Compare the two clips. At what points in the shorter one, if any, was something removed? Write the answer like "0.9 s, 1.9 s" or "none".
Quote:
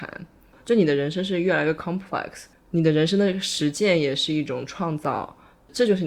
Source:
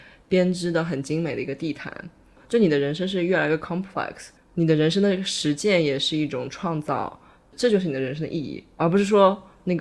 none